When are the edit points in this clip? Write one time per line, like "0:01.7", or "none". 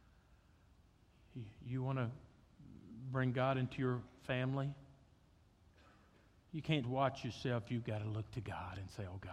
0:06.8